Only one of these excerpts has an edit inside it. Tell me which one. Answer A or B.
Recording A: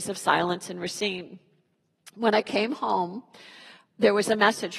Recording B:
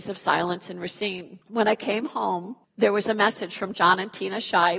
B